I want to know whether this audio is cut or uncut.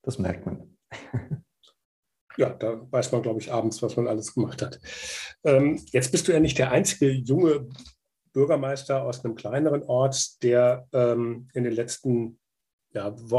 uncut